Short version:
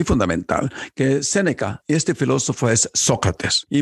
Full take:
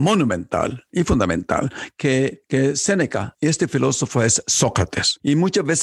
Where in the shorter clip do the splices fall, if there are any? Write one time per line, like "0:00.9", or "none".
0:00.9